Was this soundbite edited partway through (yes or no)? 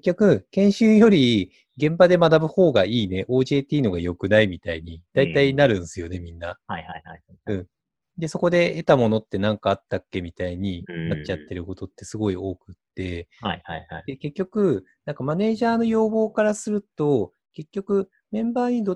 no